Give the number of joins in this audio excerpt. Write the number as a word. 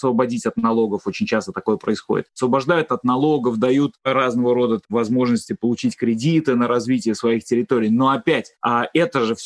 zero